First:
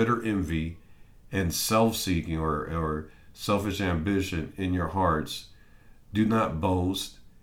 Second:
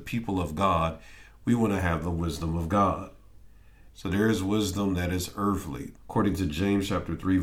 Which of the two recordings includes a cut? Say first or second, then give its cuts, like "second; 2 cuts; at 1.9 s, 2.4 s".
second; 2 cuts; at 3.9 s, 6.0 s